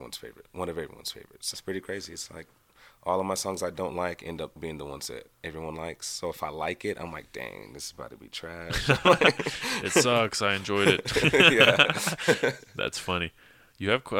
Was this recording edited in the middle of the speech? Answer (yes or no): yes